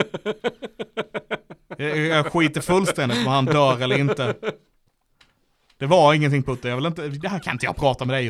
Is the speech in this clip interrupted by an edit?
no; 0 cuts

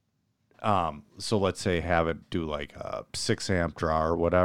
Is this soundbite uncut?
yes; 0 cuts

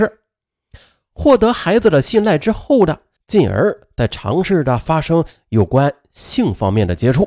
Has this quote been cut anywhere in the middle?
yes; 1 cut; at 3.2 s

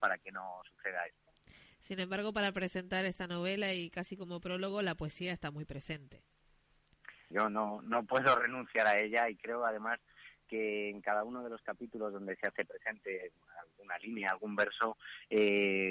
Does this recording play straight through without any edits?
no; 1 cut; at 7.3 s

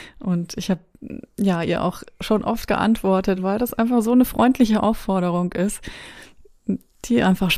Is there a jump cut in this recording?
no; 0 cuts

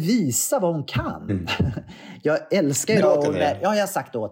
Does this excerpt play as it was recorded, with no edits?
no; 2 cuts; at 1.3 s, 3.0 s

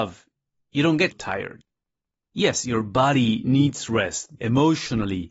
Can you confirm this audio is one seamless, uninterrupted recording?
no; 2 cuts; at 1.1 s, 4.4 s

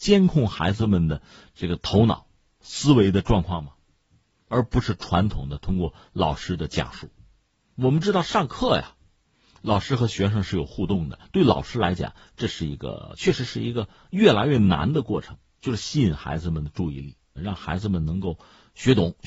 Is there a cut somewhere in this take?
yes; 1 cut; at 17.4 s

